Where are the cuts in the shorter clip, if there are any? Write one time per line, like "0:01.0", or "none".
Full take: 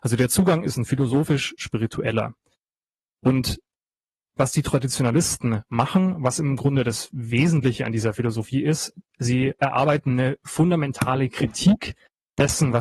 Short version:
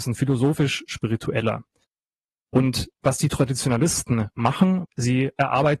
0:02.9
0:04.8

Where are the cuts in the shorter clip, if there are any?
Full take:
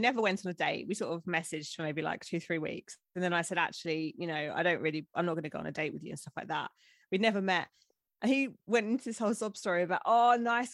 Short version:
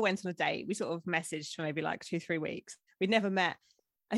0:02.9

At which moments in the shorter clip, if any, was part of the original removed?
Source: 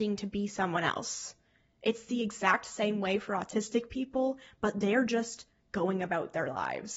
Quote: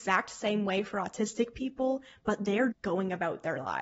0:02.7

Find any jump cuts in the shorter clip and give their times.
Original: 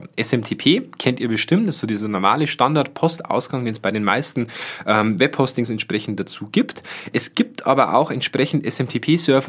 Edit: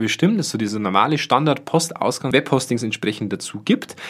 0:02.3

